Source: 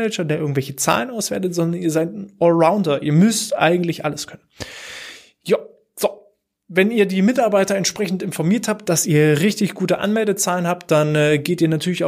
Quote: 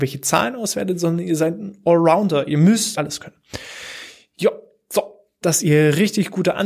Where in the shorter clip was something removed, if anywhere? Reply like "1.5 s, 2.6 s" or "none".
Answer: 2.9 s, 5.4 s